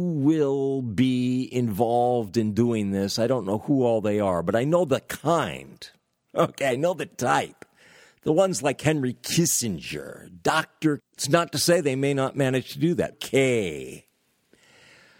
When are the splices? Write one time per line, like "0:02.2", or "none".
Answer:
0:11.0
0:13.1